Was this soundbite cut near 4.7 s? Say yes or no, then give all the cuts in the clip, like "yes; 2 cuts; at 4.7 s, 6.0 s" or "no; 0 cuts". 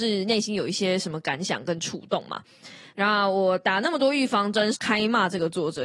yes; 2 cuts; at 2.9 s, 4.7 s